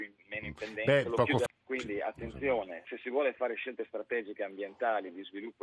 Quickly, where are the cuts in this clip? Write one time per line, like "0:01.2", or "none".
0:01.5